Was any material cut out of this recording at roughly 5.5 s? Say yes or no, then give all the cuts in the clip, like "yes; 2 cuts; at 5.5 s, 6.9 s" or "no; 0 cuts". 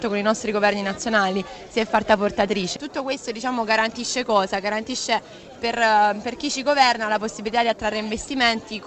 no; 1 cut; at 2.8 s